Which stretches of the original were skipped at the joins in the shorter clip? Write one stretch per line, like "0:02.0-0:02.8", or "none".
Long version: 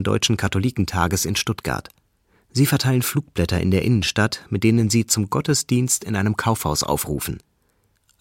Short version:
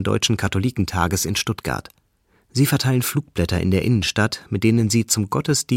none